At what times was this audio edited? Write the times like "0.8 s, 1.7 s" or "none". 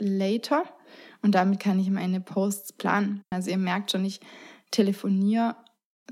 3.3 s

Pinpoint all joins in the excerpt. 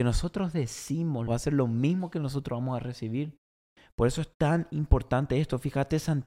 1.3 s

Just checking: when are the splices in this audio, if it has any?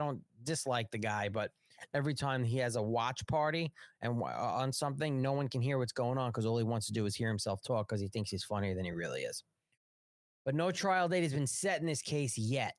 none

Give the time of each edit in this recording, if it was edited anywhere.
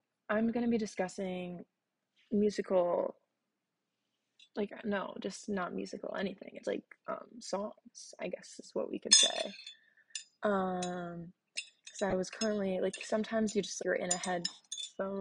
6.6 s, 13.8 s

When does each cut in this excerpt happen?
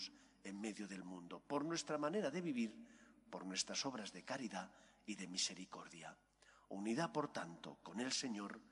none

